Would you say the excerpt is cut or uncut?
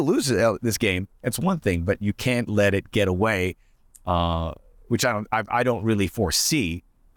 uncut